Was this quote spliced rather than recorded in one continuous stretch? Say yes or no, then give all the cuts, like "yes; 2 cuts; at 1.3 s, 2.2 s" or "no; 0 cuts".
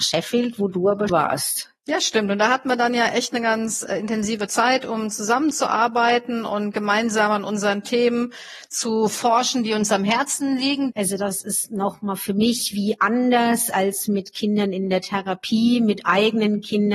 yes; 2 cuts; at 1.1 s, 10.9 s